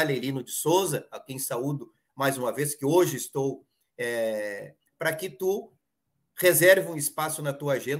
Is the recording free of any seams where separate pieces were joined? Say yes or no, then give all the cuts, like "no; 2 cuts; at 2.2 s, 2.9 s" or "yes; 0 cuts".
no; 1 cut; at 4.9 s